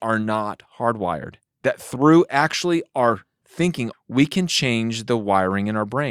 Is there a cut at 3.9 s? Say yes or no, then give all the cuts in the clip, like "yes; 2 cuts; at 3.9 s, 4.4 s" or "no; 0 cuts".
yes; 1 cut; at 3.9 s